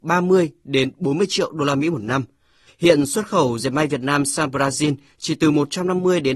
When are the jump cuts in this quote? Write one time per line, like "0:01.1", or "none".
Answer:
0:02.7